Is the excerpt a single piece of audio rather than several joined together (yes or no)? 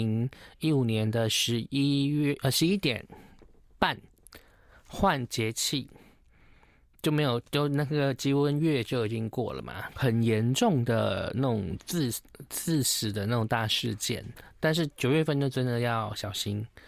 no